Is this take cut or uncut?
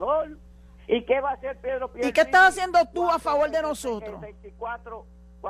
uncut